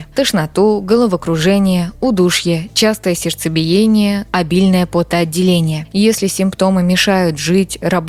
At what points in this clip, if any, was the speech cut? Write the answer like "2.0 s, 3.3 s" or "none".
4.2 s

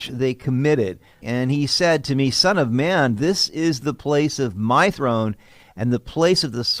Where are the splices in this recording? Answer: 1.2 s

